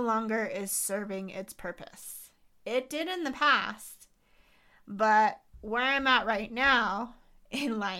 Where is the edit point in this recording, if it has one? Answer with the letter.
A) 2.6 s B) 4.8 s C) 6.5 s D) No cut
D